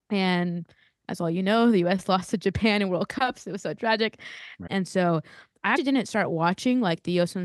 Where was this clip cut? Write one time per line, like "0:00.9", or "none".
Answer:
0:04.7
0:05.8

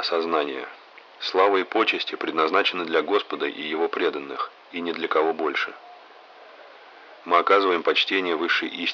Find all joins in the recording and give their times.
0:07.2

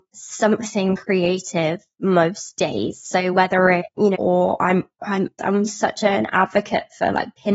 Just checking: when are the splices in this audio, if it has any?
0:04.1
0:05.4

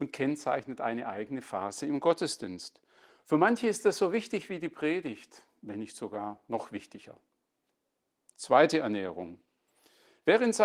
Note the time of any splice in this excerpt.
none

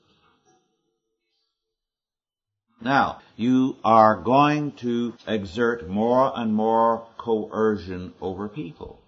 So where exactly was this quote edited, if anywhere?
0:03.2
0:05.2

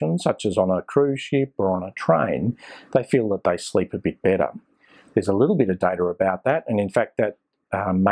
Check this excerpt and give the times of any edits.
none

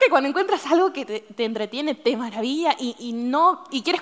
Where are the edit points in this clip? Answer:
0:01.1

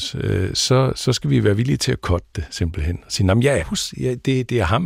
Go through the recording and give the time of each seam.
0:03.6

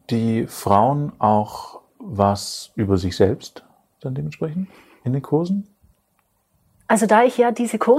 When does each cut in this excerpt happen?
none

